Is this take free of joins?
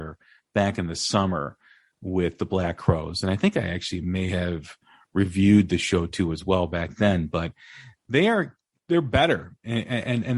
yes; 0 cuts

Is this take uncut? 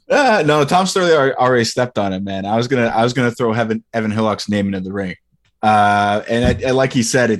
yes; 0 cuts

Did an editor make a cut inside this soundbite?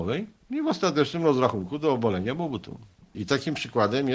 yes; 1 cut; at 3.1 s

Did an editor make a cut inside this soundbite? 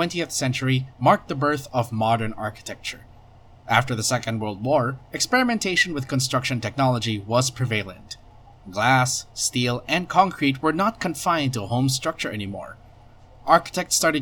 no; 0 cuts

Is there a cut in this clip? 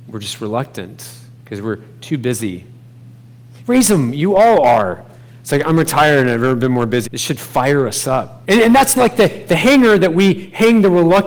yes; 3 cuts; at 3.6 s, 7.0 s, 8.4 s

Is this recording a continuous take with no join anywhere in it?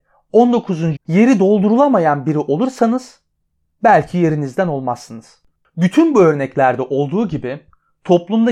no; 1 cut; at 1.0 s

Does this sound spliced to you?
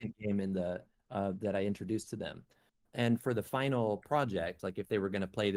no; 0 cuts

